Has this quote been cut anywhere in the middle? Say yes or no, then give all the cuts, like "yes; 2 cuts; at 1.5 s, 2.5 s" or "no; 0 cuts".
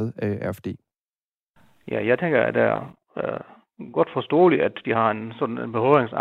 no; 0 cuts